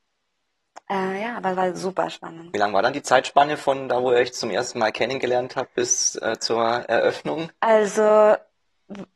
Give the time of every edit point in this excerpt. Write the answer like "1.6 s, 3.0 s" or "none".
none